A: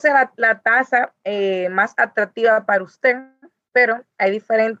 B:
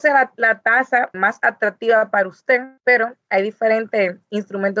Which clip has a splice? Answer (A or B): B